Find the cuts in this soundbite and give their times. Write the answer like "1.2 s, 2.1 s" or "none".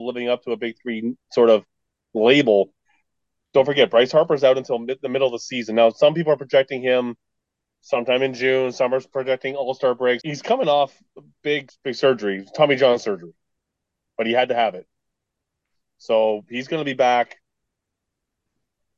10.2 s, 11.7 s, 14.1 s